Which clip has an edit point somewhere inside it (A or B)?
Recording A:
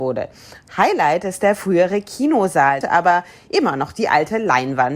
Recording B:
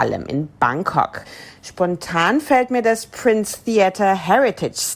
A